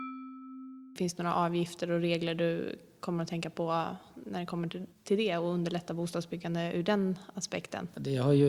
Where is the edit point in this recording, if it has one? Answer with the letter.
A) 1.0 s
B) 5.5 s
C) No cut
A